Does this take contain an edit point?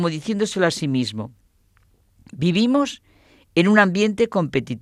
no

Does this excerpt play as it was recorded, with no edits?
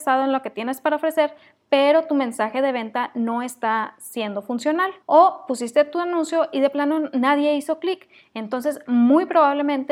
no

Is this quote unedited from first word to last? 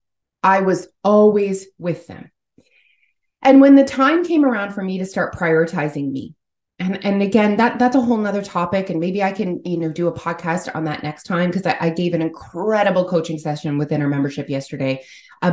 yes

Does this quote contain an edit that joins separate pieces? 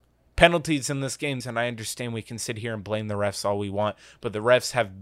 yes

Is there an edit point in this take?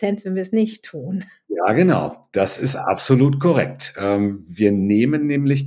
no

